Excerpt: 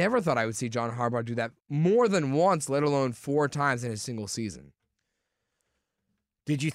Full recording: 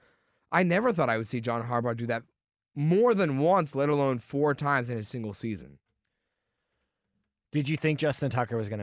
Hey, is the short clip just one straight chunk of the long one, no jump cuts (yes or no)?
no